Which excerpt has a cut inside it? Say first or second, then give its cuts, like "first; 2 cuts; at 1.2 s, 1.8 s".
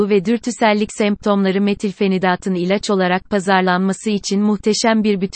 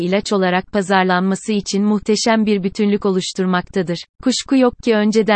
second; 1 cut; at 4.1 s